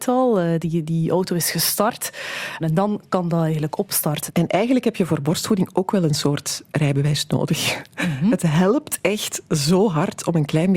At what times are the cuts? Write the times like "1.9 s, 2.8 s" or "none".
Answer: 2.6 s, 4.3 s